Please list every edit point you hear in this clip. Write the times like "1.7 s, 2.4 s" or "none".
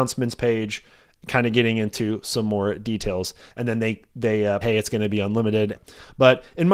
3.5 s, 4.6 s, 5.7 s